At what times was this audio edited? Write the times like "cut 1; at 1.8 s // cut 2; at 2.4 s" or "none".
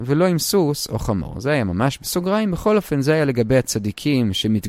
none